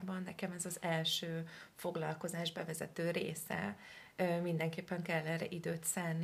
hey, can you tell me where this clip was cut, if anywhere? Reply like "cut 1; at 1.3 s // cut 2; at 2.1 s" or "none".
none

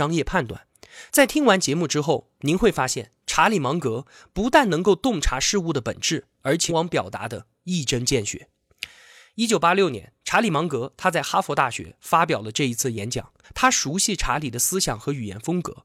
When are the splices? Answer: cut 1; at 6.7 s // cut 2; at 13.4 s

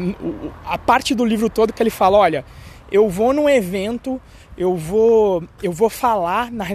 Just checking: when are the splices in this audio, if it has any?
none

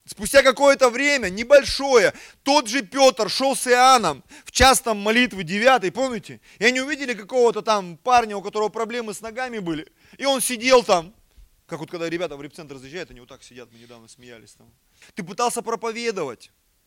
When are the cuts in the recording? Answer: cut 1; at 15.0 s

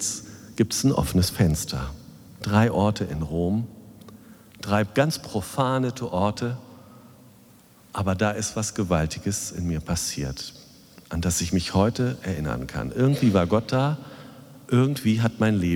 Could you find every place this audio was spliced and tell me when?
none

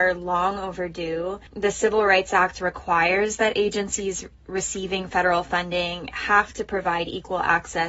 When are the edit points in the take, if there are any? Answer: cut 1; at 1.5 s

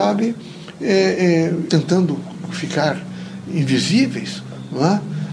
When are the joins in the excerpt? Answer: cut 1; at 1.7 s

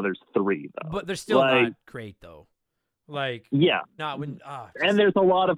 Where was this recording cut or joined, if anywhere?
cut 1; at 4.0 s

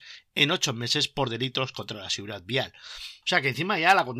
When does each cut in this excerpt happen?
cut 1; at 3.2 s

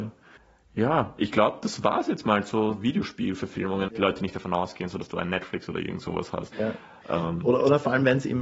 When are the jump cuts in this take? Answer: cut 1; at 3.9 s // cut 2; at 6.5 s

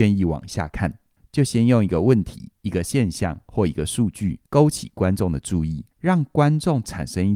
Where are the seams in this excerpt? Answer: cut 1; at 1.2 s // cut 2; at 4.5 s // cut 3; at 5.9 s

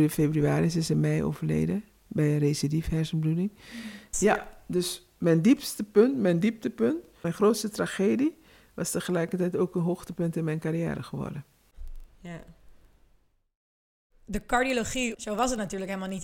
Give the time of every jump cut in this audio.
cut 1; at 4.1 s // cut 2; at 12.1 s // cut 3; at 15.1 s

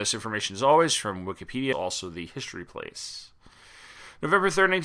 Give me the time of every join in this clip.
cut 1; at 1.7 s

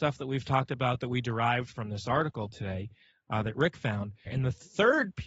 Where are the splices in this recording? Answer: cut 1; at 4.3 s

